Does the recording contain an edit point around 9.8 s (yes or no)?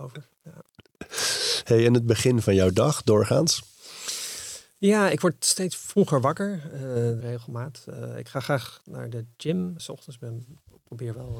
yes